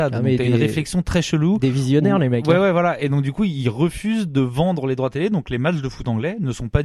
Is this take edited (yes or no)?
no